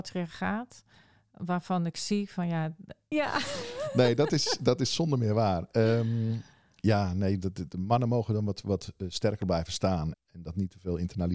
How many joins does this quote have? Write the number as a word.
two